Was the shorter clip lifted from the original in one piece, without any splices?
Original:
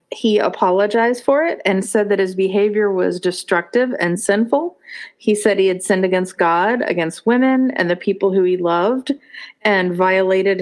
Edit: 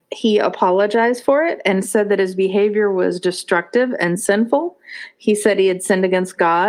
yes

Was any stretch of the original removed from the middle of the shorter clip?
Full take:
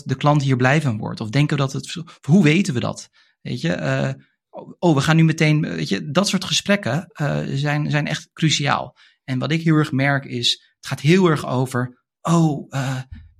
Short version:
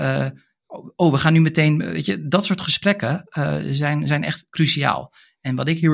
no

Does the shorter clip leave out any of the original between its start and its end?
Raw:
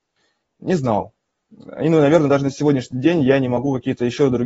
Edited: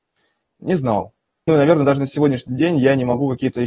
yes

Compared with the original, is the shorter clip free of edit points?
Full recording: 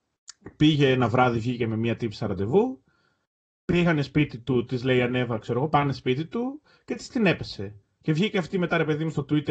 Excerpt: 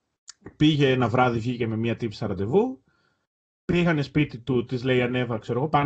yes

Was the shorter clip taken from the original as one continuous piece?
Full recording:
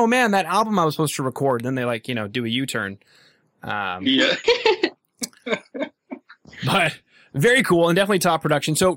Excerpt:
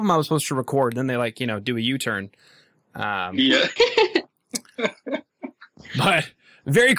yes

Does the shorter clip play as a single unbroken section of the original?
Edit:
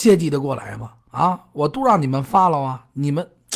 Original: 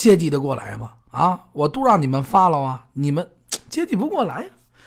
yes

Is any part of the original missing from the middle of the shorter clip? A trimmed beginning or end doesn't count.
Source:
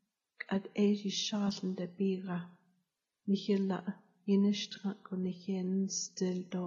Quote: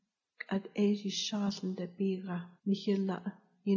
yes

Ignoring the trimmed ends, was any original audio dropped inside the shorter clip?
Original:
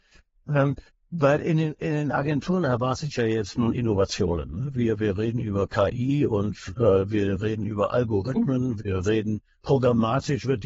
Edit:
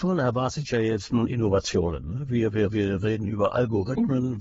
yes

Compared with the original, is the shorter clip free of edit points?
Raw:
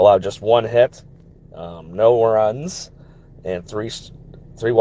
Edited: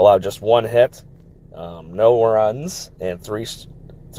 no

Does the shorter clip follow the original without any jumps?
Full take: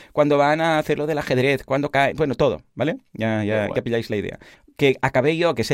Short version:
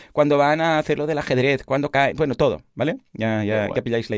yes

